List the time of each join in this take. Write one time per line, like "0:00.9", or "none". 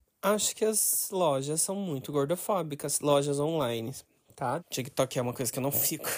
0:04.6